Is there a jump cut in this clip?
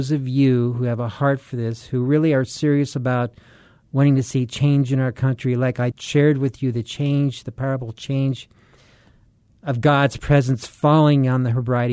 yes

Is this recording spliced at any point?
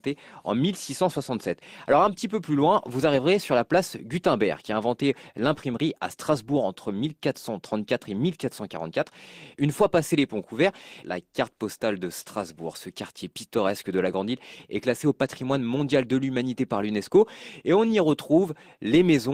yes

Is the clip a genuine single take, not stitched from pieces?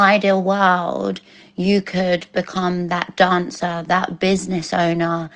no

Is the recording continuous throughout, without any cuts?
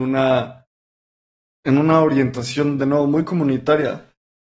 yes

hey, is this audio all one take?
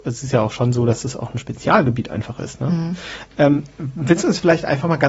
yes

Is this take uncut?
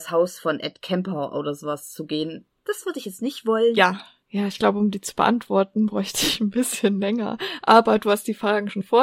no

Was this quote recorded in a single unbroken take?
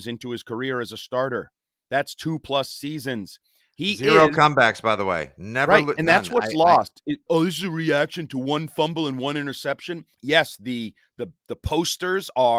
no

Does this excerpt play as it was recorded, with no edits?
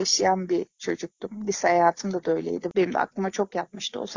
no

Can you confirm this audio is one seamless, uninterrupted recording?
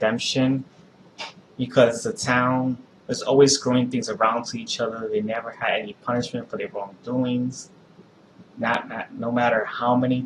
no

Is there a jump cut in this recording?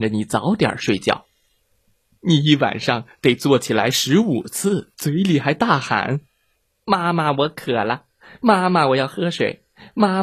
yes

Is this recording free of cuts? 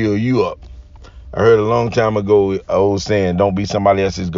yes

